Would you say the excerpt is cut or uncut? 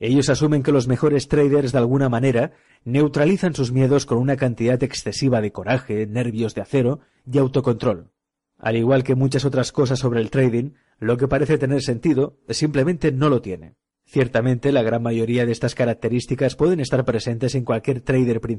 uncut